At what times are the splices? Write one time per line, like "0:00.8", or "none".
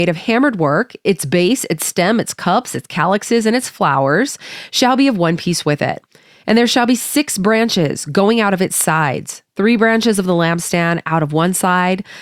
none

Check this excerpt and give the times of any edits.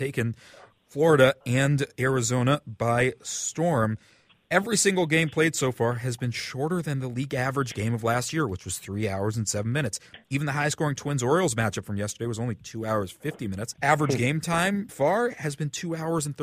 0:13.7
0:14.9

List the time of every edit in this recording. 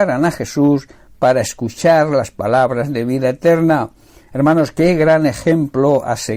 none

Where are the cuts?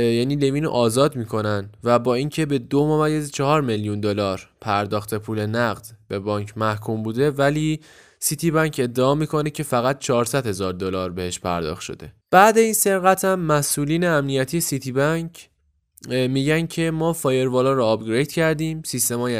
0:12.2

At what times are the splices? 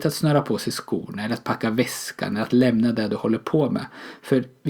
none

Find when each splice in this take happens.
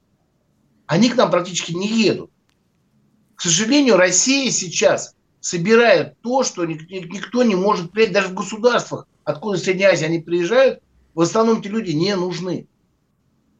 none

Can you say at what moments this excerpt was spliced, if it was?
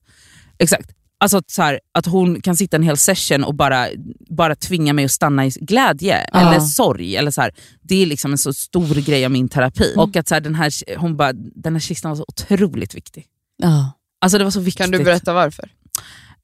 0:10.0

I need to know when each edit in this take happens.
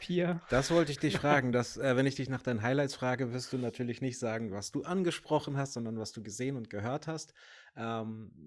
none

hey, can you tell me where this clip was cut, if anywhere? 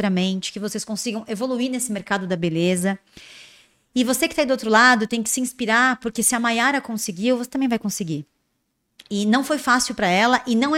none

